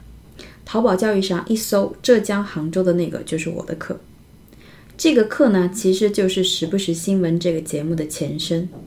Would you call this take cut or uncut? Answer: uncut